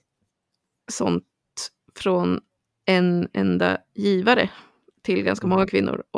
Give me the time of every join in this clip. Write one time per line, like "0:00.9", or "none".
none